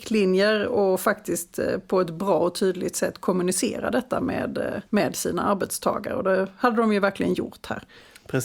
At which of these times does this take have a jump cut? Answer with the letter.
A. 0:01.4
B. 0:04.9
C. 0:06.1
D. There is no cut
B